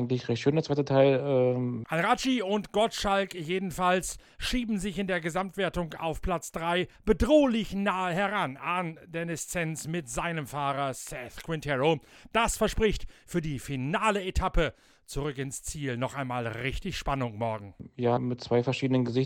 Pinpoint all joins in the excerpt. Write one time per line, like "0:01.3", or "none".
0:01.8
0:18.2

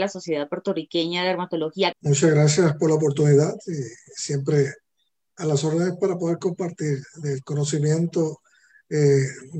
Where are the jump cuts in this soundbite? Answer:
0:01.9

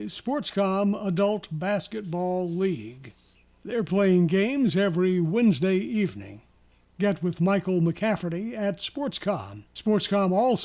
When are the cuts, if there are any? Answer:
0:09.7

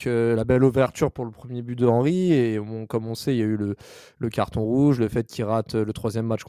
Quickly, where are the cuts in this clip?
none

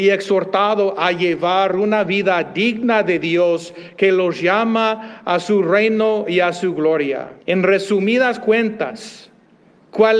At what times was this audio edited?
0:07.4

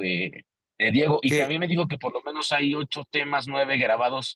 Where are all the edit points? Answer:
none

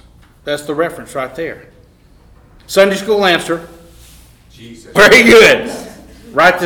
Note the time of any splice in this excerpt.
0:02.6
0:04.9

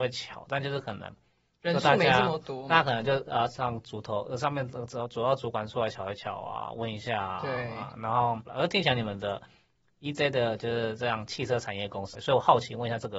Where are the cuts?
0:08.5
0:12.1

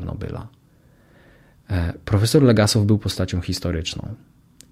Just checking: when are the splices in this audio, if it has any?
none

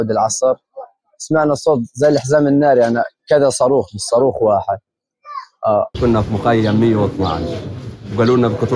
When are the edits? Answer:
0:05.9

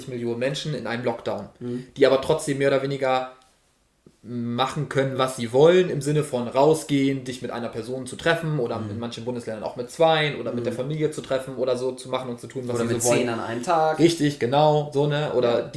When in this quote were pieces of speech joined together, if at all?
none

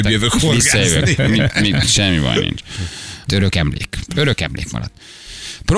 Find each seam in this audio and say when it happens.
0:01.8
0:03.3

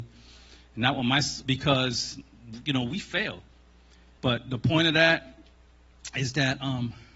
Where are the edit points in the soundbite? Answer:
0:01.4
0:04.2

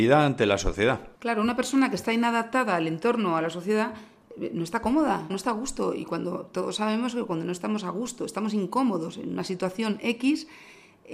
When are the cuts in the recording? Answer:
0:01.1
0:05.3

